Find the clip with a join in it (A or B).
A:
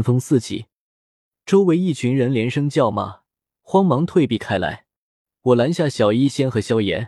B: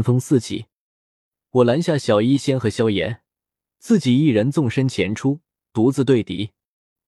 B